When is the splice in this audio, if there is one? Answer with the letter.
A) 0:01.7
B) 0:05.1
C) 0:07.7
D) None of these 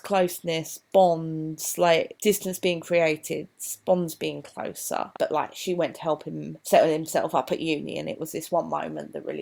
B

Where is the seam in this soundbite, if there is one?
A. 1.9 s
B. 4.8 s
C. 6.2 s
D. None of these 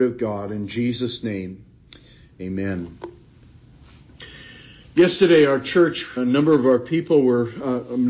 C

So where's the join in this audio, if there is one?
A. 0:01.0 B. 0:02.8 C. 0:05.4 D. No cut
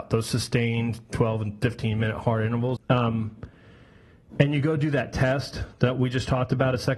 B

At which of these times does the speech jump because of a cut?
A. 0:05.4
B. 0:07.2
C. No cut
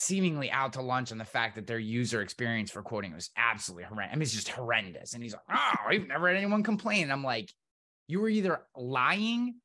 C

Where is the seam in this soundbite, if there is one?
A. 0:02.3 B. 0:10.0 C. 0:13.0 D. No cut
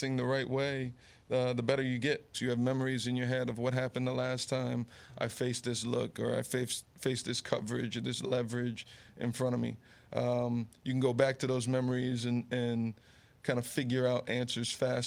A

